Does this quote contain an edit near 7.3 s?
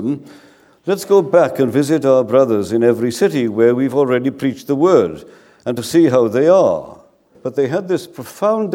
yes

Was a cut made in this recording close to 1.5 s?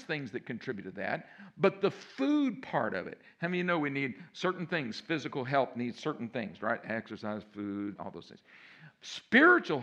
no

